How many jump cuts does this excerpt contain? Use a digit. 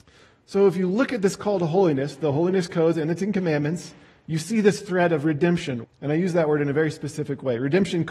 1